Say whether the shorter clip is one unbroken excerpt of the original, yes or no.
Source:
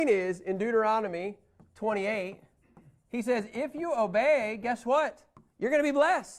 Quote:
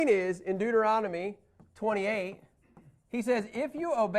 yes